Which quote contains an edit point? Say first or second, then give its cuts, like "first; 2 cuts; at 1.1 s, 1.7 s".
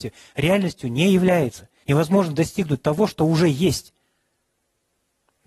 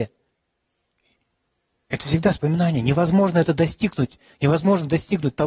first; 1 cut; at 1.8 s